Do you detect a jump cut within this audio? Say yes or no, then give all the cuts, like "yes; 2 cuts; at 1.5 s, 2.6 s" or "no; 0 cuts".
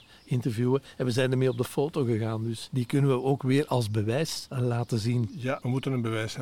no; 0 cuts